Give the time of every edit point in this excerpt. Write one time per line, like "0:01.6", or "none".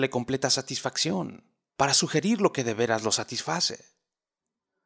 0:01.7